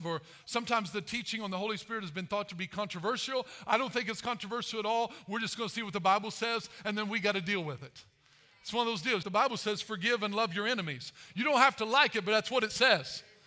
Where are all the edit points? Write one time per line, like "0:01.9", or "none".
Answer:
0:09.2

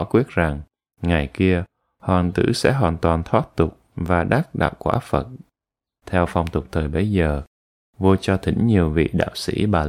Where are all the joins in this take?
0:06.0

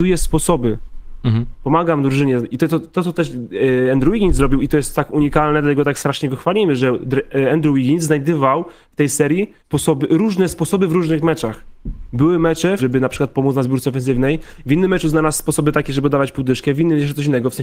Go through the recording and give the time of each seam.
0:09.6
0:12.8

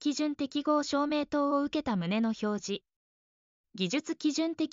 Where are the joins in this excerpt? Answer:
0:03.5

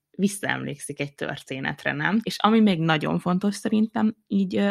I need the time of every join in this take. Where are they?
0:02.2

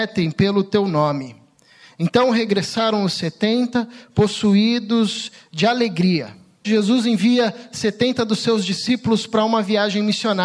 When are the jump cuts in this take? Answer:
0:06.6

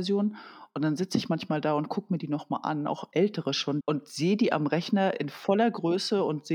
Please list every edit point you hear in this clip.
0:03.8

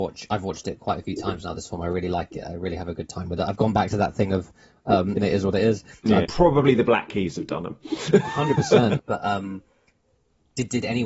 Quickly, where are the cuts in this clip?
0:05.2
0:06.2
0:09.0

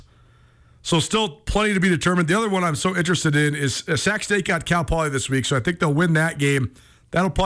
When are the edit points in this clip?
none

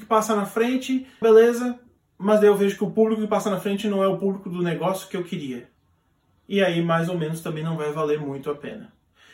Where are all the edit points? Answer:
0:01.2

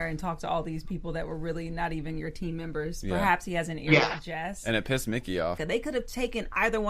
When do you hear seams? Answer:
0:05.6

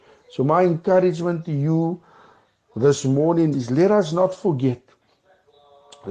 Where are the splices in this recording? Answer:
0:03.5

